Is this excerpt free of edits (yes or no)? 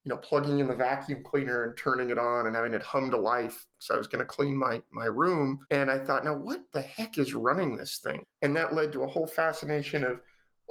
no